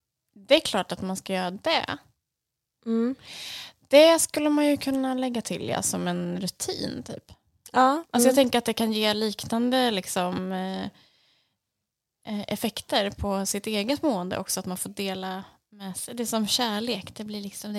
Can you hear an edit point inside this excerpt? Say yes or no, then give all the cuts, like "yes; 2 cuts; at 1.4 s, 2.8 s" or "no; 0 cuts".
yes; 1 cut; at 8.0 s